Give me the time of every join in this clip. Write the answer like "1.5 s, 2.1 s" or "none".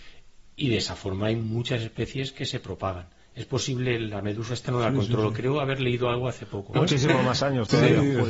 6.8 s